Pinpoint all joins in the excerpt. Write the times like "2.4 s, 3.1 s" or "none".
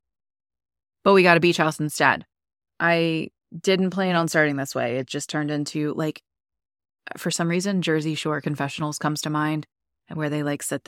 2.7 s